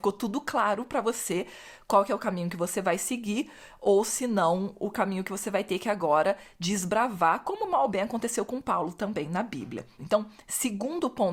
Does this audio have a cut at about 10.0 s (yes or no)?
yes